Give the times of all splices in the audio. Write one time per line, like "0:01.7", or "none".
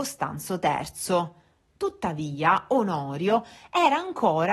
none

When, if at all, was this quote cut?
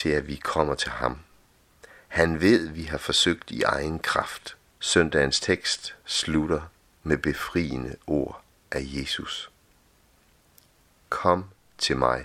0:02.0
0:04.7

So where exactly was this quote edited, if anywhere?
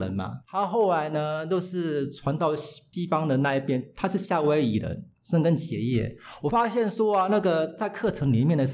0:05.1

